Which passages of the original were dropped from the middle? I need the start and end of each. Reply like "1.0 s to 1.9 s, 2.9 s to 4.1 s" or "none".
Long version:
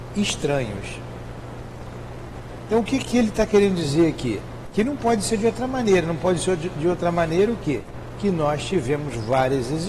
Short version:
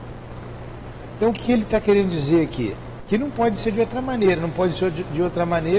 2.8 s to 3.0 s